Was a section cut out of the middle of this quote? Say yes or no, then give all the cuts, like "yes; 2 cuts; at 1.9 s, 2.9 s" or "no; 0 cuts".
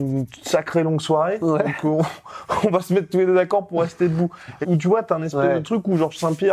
yes; 1 cut; at 4.6 s